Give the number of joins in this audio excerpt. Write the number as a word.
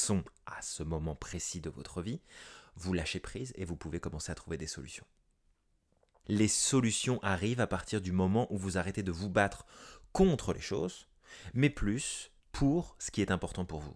two